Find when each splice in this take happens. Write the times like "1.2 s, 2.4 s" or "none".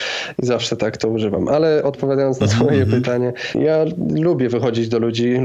3.5 s